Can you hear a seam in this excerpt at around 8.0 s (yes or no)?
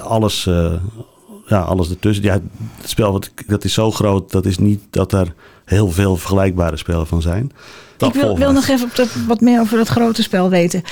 yes